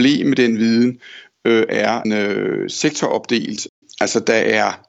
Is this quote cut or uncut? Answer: cut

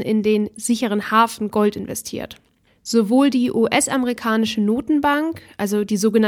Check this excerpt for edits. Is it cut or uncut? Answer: cut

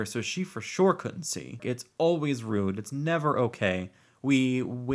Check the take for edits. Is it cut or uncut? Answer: cut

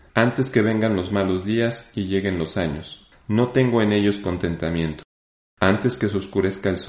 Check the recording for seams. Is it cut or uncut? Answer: cut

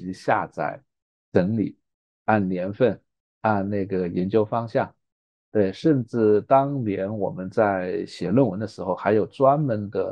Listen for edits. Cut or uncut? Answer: uncut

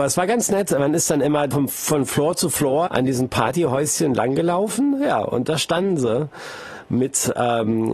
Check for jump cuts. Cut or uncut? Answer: cut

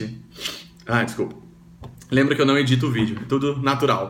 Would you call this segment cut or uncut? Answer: uncut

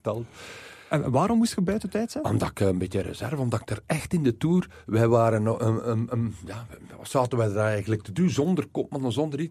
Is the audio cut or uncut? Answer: uncut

